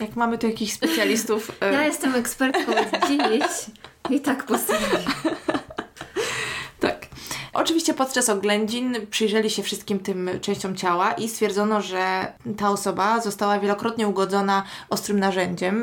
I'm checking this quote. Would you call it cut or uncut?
uncut